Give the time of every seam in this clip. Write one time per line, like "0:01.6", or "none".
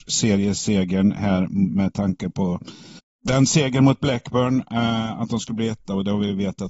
none

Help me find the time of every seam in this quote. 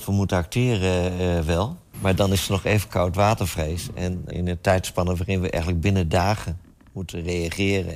0:01.9
0:04.3

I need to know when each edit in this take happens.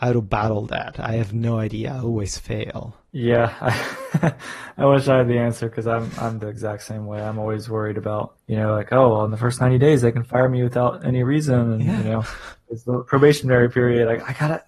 none

